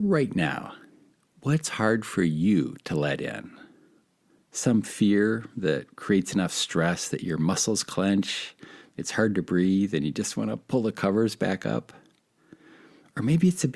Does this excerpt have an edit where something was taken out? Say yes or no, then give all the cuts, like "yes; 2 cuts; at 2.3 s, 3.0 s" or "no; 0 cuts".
no; 0 cuts